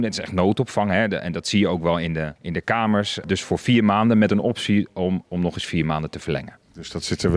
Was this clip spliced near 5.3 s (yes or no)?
yes